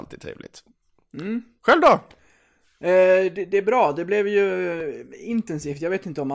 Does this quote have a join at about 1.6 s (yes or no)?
no